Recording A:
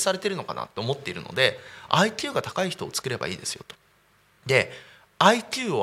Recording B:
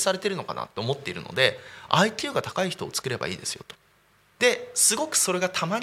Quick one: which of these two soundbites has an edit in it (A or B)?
B